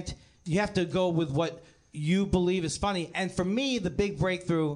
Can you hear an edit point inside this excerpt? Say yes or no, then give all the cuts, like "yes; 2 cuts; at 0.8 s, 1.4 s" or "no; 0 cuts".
no; 0 cuts